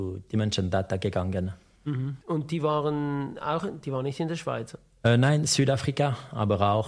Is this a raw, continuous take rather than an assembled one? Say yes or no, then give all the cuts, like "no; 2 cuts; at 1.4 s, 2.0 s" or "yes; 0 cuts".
no; 1 cut; at 2.2 s